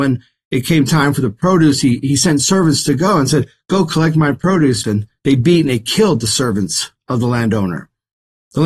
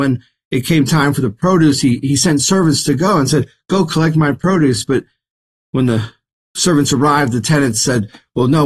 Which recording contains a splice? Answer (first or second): first